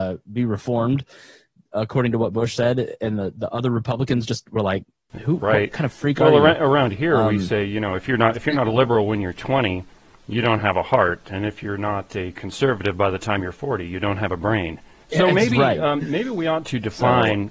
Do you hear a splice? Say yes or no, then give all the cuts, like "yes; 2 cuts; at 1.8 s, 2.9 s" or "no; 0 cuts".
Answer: no; 0 cuts